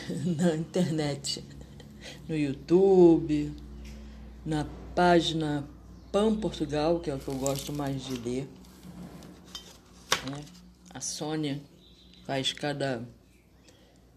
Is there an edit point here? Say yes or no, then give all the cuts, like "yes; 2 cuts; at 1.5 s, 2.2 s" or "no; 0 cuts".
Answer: no; 0 cuts